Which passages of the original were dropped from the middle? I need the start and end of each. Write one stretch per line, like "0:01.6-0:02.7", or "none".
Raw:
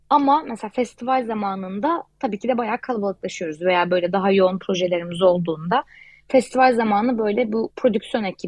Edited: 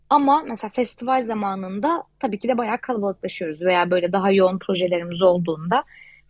none